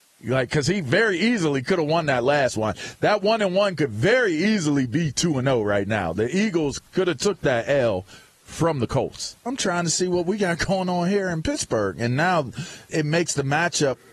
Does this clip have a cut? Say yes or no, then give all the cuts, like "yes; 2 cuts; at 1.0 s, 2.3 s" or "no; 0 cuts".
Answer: yes; 2 cuts; at 9.5 s, 12.9 s